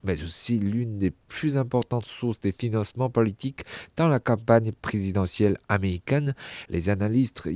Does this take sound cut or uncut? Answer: cut